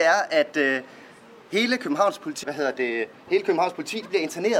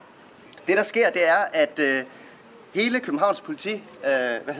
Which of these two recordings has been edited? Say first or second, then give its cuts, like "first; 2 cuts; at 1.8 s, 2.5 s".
first; 1 cut; at 2.4 s